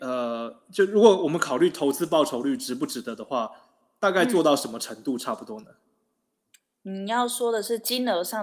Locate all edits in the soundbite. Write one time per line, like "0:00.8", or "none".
none